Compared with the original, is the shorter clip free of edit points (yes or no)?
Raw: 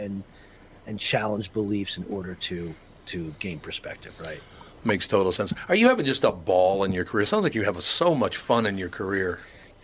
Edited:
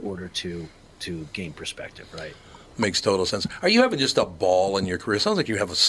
yes